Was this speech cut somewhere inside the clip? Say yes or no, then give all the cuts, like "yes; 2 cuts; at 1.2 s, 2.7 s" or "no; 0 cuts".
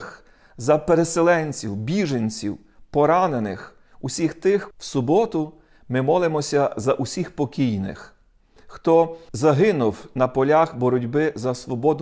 yes; 2 cuts; at 4.7 s, 8.6 s